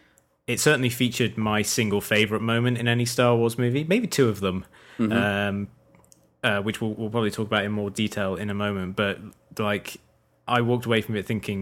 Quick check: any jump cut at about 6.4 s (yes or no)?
no